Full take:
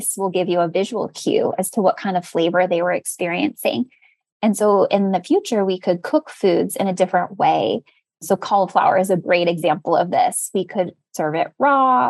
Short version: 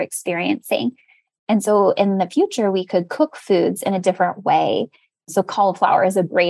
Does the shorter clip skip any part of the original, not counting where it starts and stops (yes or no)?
no